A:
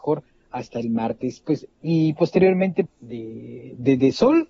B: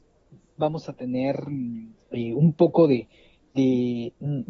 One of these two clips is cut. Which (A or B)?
A